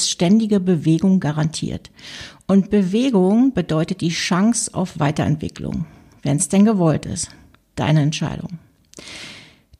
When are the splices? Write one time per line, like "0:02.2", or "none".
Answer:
none